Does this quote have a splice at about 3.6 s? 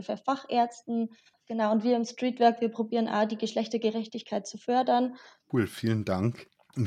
no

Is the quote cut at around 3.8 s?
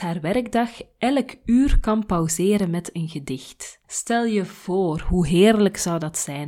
yes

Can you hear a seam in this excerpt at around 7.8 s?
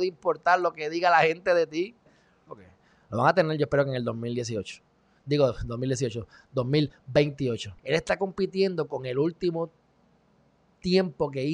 yes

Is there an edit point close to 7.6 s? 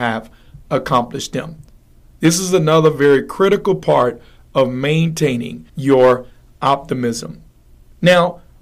no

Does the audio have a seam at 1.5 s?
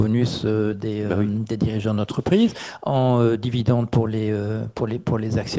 no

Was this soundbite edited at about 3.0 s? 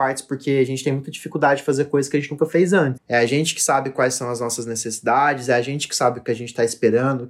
yes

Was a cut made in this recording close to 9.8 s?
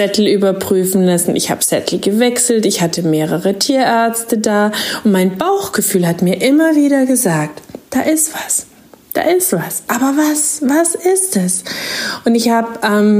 yes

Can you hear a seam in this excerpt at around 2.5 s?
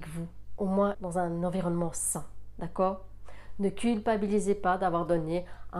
no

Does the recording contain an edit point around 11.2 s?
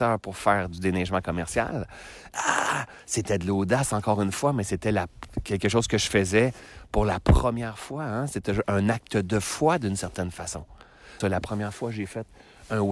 yes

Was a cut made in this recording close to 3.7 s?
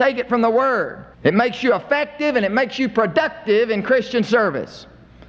no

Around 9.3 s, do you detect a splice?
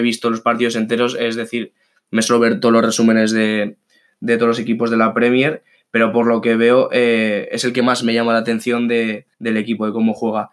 yes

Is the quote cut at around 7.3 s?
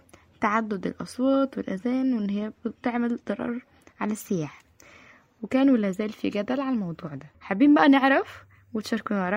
yes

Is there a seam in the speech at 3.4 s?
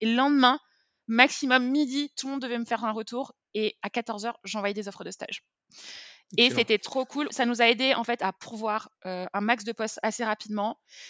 no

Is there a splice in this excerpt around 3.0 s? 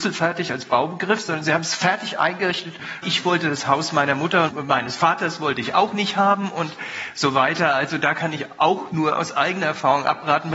yes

